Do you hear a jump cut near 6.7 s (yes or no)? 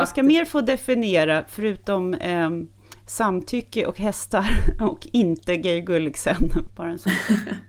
yes